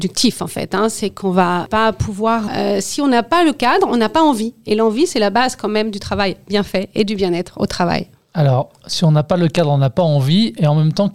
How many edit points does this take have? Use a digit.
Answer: 1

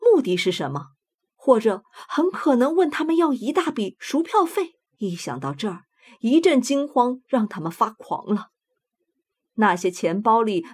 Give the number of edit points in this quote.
2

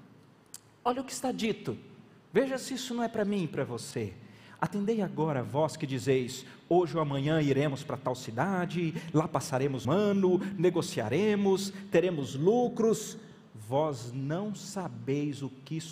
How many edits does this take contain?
1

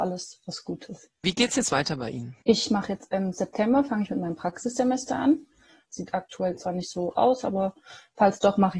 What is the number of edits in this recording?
2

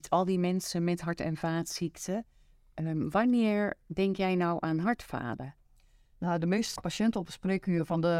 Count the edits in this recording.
1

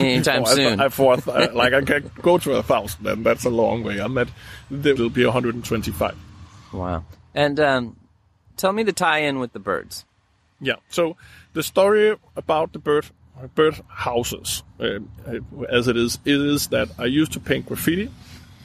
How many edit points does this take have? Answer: 1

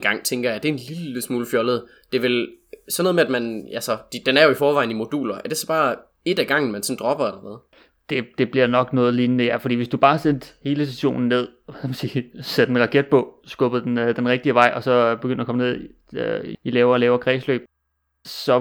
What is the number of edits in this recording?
1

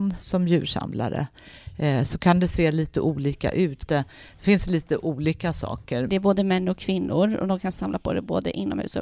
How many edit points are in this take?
2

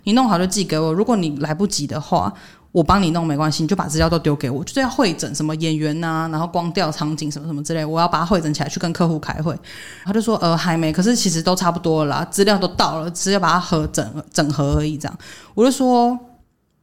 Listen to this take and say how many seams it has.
1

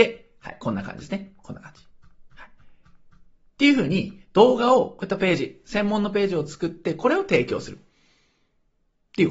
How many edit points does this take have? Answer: 0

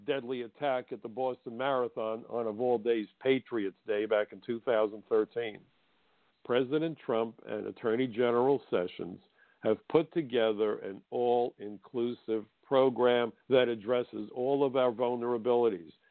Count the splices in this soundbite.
2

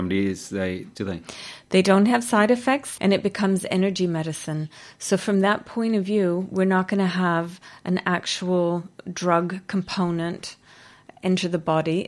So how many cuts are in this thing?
2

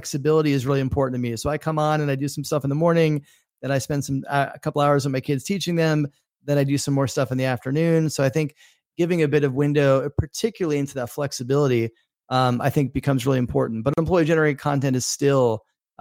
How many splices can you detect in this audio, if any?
0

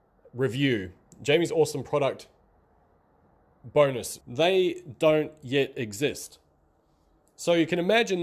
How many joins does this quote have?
1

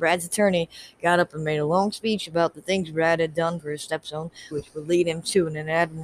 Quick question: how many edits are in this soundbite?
1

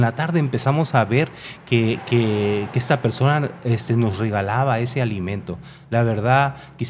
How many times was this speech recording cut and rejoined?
0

